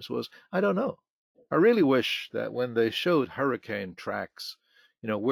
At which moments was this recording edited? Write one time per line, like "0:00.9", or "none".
0:01.3